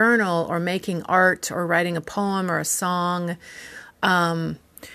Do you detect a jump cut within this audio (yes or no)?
no